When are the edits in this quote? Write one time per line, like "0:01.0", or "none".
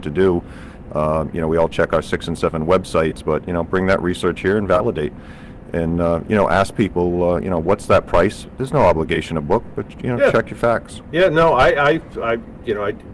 none